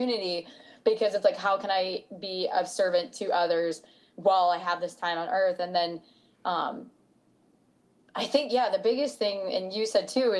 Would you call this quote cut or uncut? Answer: uncut